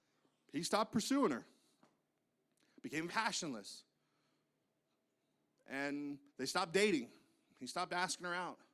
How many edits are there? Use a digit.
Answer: 2